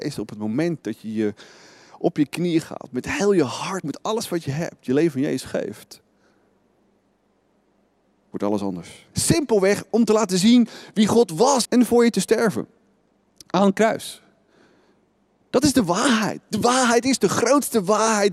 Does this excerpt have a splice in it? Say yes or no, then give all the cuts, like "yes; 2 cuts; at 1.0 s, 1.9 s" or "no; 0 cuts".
yes; 3 cuts; at 3.8 s, 9.1 s, 11.6 s